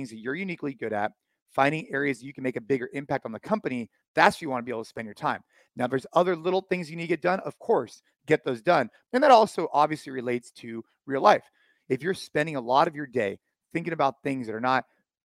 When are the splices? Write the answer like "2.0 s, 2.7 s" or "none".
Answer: 9.1 s